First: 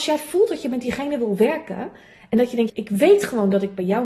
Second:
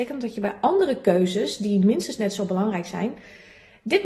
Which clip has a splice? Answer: first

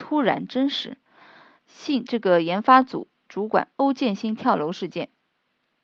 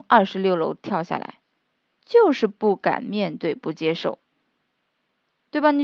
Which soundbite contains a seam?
first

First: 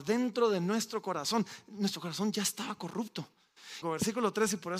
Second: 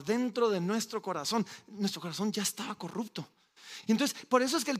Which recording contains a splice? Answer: first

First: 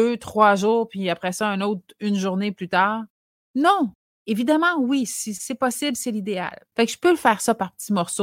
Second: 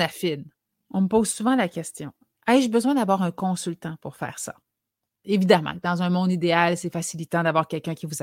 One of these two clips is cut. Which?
first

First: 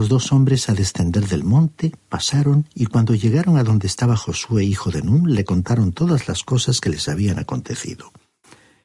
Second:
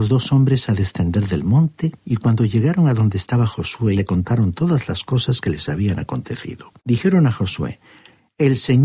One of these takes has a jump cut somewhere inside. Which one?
second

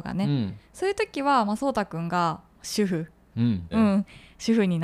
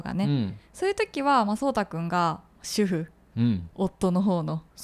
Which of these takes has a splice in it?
first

